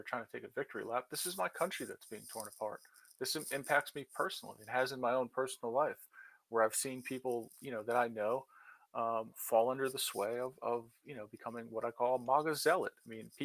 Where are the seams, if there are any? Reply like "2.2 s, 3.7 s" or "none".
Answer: none